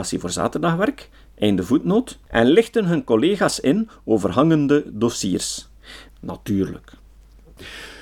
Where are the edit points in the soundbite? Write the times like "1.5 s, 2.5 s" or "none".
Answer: 2.2 s, 6.1 s